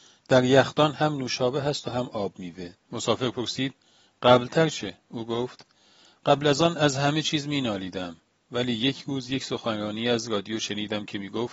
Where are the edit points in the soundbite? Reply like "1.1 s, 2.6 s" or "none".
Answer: 2.7 s